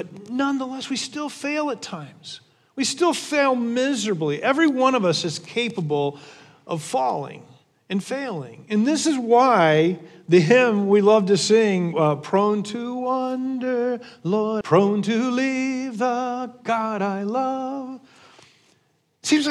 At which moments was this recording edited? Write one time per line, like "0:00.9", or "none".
0:11.9
0:14.6